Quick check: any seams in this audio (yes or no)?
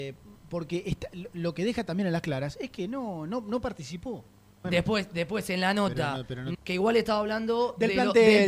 yes